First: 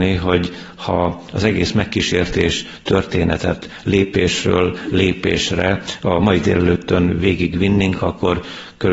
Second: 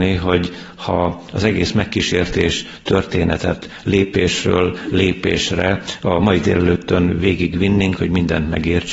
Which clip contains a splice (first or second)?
second